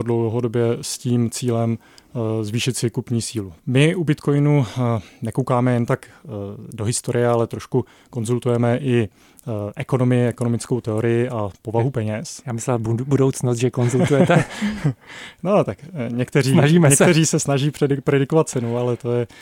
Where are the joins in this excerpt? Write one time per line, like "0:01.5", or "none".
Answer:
0:03.6